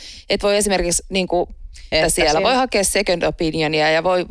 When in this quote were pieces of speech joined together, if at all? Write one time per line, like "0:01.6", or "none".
0:01.9